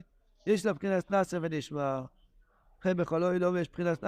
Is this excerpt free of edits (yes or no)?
yes